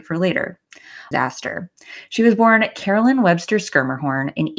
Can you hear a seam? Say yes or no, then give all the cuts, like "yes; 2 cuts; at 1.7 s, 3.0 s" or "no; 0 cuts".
yes; 1 cut; at 1.1 s